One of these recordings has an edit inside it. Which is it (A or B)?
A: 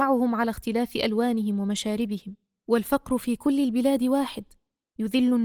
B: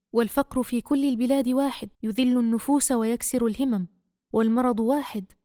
B